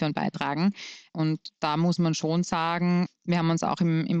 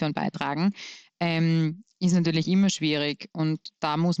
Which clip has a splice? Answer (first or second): first